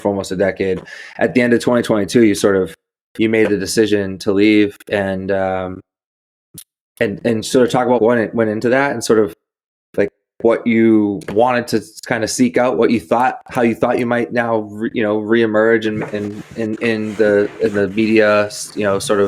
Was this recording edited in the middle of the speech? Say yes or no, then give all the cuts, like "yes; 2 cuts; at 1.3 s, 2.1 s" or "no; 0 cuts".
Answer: yes; 1 cut; at 8.0 s